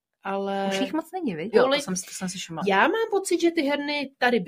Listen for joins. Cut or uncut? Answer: cut